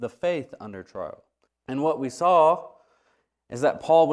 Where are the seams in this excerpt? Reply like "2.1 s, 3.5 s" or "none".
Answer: 1.5 s